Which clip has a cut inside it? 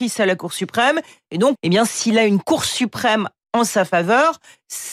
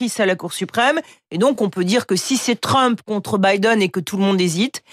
first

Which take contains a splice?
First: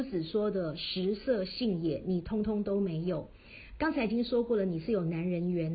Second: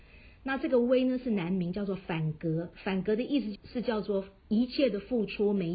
second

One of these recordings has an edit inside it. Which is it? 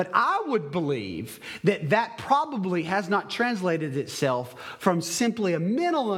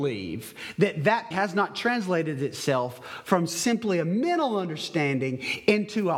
second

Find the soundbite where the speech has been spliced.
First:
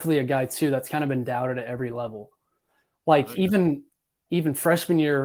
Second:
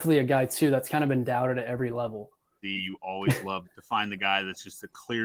second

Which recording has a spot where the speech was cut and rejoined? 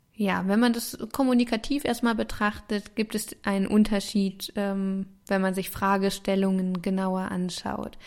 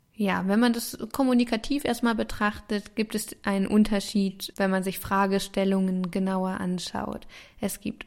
second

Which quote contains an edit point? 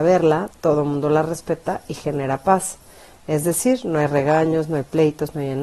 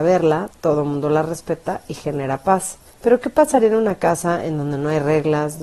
second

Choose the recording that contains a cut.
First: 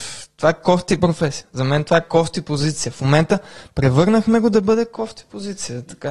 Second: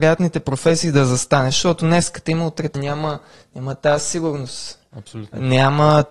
second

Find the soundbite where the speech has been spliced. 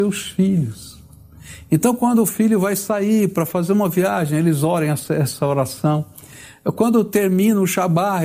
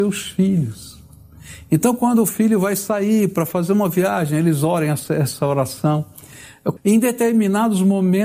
second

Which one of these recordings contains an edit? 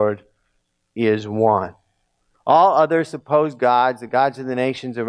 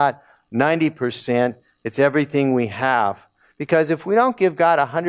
first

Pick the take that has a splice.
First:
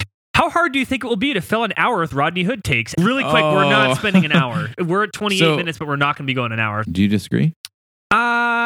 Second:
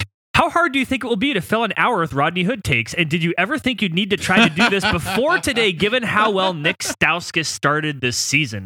first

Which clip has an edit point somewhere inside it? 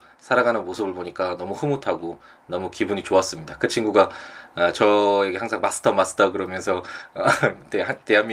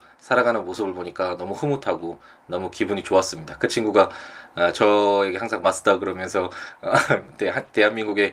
second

